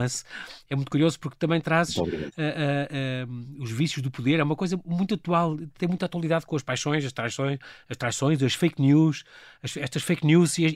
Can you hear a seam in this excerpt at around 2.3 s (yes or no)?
no